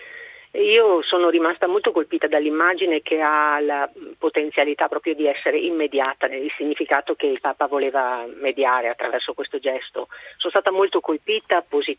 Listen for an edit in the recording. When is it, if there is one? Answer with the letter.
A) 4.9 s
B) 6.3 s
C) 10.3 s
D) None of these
B